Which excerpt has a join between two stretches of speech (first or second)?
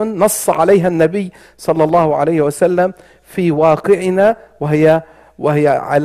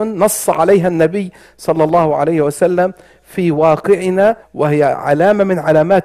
second